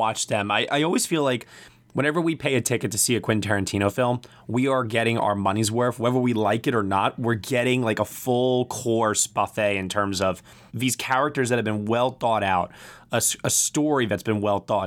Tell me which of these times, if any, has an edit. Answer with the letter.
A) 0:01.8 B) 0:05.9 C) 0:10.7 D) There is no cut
C